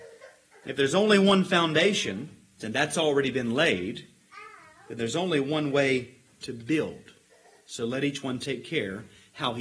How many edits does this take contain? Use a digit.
1